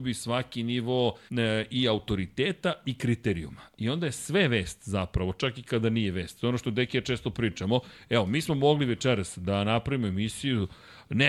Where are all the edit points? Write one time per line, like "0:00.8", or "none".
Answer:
0:01.3